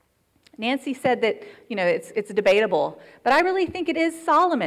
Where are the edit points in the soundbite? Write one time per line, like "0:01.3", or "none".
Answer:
none